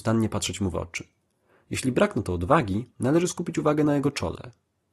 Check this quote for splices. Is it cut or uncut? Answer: uncut